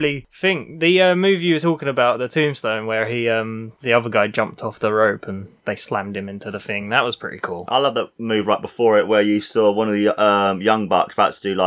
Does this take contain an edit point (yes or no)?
no